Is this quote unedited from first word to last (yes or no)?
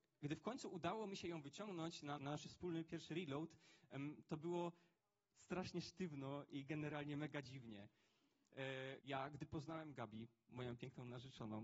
no